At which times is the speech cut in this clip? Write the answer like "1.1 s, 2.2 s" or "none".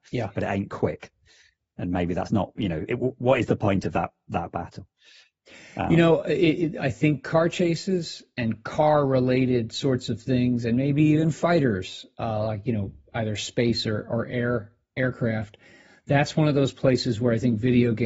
none